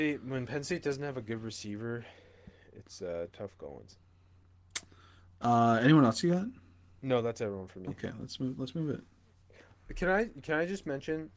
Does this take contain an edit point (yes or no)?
no